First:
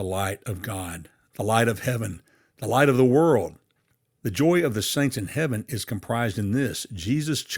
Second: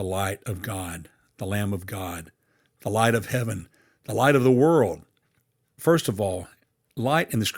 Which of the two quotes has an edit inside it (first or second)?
first